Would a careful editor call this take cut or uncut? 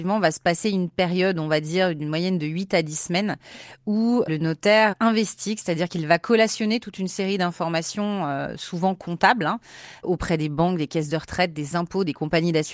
uncut